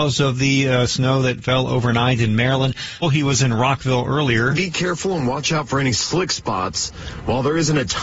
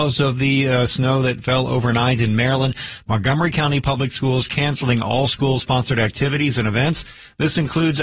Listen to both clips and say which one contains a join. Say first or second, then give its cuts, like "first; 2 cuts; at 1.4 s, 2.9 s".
first; 1 cut; at 3.0 s